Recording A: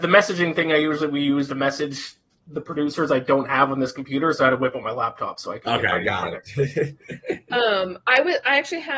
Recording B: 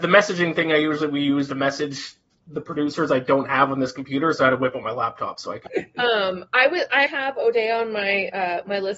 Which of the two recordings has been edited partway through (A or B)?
B